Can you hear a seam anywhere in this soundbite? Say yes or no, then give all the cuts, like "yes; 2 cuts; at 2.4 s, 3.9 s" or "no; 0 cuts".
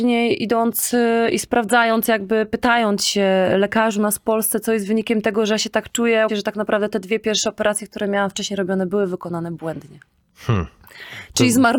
yes; 1 cut; at 6.3 s